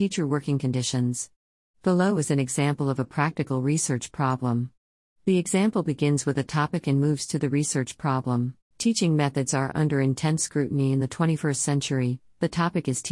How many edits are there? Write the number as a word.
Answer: one